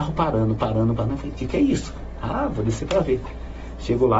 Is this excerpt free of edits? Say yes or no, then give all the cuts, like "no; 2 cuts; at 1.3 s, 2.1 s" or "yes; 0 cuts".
no; 1 cut; at 0.9 s